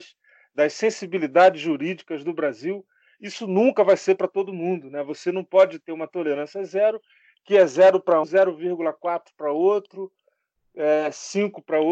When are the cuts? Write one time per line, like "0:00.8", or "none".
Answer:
0:08.2